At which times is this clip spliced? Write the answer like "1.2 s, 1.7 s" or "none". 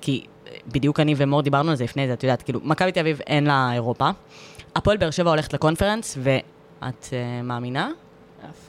6.8 s